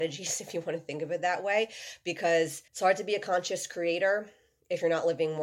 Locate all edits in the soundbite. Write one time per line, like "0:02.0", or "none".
0:02.7